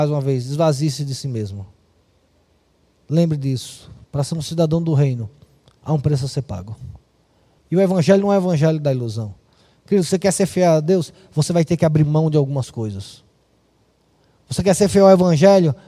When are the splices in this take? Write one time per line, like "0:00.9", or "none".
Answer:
0:07.6